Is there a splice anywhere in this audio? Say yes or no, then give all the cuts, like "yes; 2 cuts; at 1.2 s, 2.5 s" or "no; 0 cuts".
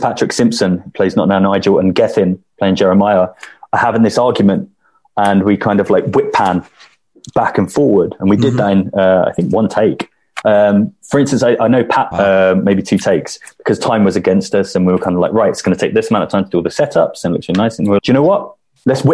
yes; 3 cuts; at 10.4 s, 12.1 s, 18.0 s